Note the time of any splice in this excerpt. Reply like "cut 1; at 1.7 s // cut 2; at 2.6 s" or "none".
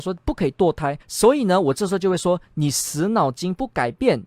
cut 1; at 1.0 s